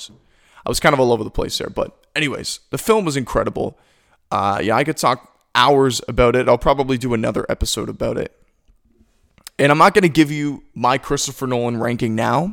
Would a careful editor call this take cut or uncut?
uncut